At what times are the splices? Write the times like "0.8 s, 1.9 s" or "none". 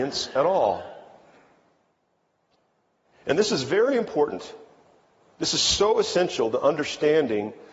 none